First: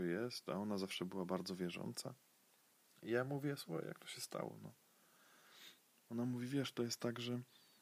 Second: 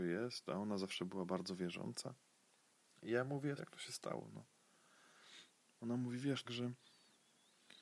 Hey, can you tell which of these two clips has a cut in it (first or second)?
second